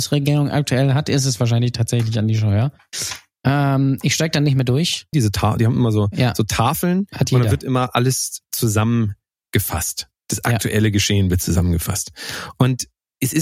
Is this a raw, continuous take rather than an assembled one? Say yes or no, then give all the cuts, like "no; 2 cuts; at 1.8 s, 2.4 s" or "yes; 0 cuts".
no; 1 cut; at 5.1 s